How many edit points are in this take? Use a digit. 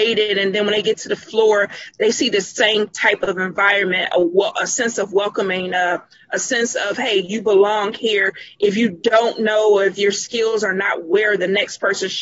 0